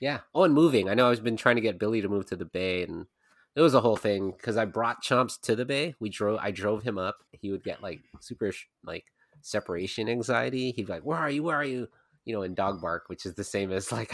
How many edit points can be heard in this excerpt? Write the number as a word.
one